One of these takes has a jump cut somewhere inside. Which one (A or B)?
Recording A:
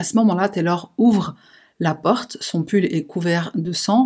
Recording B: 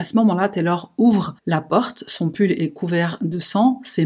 B